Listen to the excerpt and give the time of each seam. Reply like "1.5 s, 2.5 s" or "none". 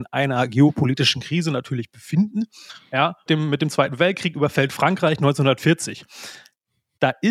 3.3 s